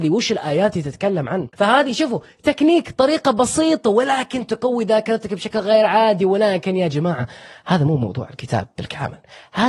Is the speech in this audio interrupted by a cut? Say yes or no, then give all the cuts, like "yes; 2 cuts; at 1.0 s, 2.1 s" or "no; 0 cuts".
yes; 1 cut; at 1.5 s